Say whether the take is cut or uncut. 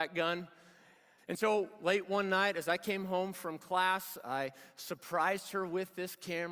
cut